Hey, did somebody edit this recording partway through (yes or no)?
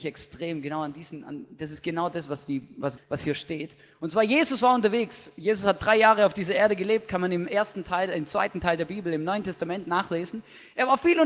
yes